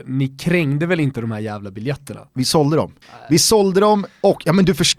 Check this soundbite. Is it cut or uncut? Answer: cut